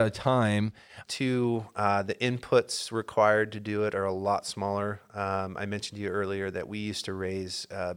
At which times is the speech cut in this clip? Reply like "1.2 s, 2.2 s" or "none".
1.1 s